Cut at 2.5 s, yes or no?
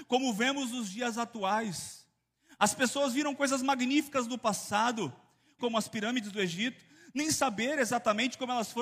no